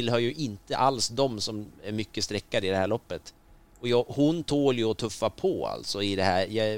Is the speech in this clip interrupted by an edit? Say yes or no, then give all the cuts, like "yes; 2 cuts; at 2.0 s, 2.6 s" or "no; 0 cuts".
no; 0 cuts